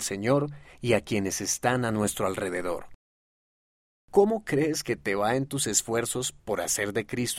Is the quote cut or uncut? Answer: cut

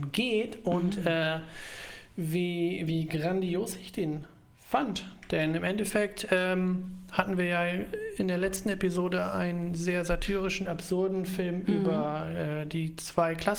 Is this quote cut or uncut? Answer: uncut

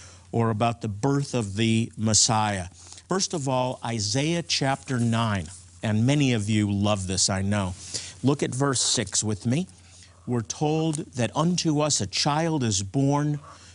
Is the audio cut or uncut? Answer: uncut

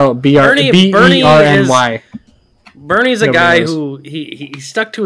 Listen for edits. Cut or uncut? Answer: uncut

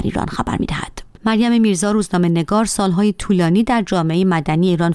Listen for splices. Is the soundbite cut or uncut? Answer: cut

